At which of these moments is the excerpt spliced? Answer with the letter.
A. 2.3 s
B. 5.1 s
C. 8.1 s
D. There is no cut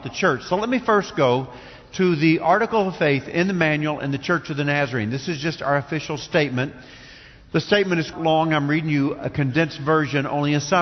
C